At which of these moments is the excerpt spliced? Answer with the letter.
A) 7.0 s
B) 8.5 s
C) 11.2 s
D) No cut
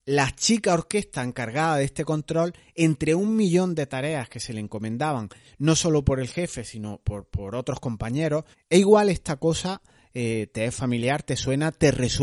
B